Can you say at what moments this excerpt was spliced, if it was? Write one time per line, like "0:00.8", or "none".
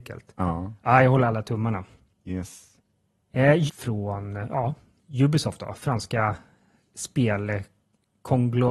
0:03.7